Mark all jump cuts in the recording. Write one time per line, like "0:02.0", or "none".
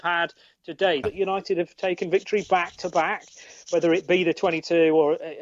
0:01.0